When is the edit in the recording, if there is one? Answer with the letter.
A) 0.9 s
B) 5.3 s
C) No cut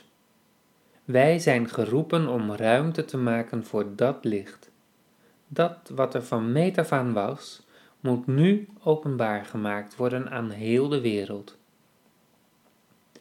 A